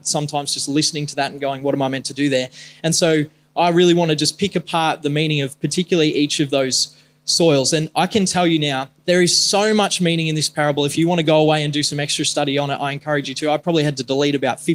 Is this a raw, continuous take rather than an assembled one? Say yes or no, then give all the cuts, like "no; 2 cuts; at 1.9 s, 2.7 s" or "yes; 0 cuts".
yes; 0 cuts